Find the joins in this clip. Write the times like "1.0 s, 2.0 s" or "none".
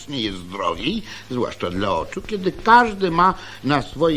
none